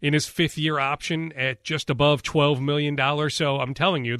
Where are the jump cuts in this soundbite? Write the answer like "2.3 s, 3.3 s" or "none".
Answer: none